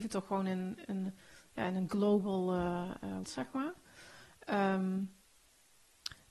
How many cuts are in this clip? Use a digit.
1